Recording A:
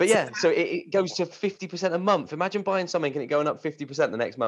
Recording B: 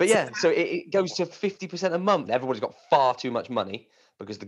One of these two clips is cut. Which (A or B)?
B